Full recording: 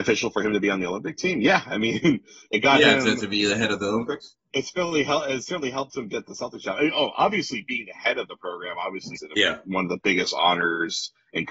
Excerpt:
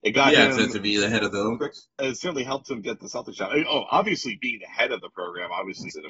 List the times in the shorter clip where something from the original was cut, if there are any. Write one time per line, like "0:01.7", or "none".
0:02.0